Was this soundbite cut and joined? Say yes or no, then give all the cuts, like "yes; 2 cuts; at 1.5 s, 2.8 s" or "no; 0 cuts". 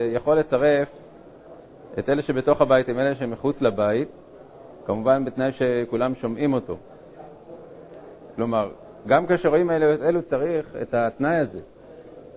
yes; 1 cut; at 8.3 s